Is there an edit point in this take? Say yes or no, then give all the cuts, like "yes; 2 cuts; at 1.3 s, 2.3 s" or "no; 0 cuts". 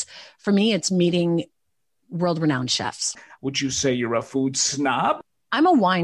no; 0 cuts